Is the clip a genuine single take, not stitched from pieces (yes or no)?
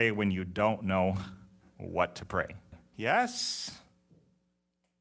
no